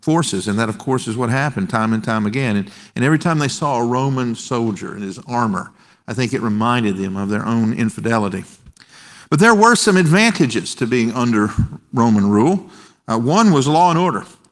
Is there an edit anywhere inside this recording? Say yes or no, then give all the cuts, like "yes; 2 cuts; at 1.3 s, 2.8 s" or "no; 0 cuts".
no; 0 cuts